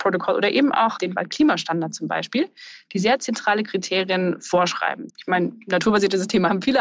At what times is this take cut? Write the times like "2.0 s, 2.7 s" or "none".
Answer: 5.1 s